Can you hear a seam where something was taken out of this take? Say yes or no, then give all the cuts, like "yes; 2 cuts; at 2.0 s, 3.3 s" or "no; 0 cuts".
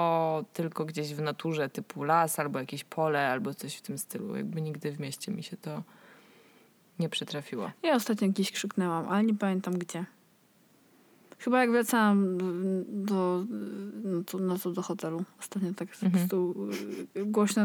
no; 0 cuts